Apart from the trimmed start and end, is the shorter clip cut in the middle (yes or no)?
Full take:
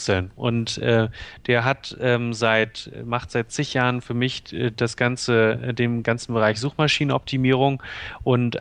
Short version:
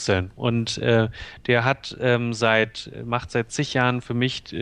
no